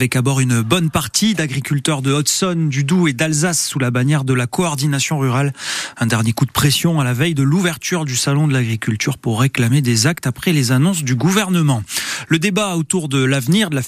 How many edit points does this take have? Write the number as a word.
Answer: zero